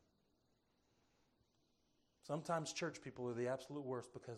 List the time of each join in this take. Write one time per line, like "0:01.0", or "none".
none